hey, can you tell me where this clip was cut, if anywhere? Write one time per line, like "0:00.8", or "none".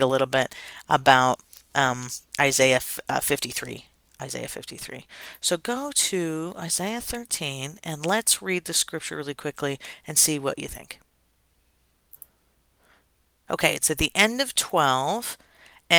none